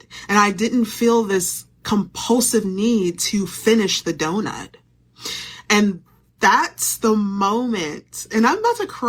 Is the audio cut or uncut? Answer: uncut